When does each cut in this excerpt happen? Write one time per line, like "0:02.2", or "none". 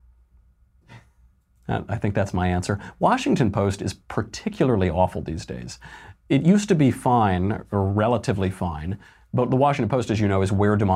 none